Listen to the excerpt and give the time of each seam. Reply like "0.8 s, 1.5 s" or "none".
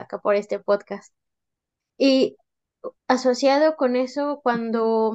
3.0 s